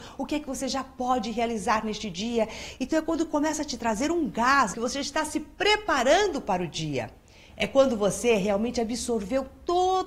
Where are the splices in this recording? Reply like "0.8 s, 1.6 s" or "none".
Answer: 4.7 s, 7.5 s

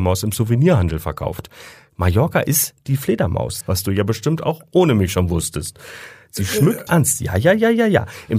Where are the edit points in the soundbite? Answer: 3.6 s, 6.9 s

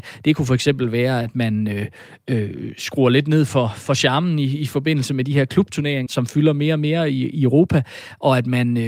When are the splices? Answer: 6.1 s

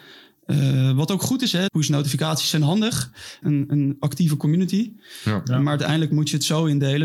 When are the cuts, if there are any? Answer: 1.7 s, 3.4 s

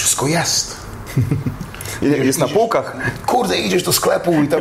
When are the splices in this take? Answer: none

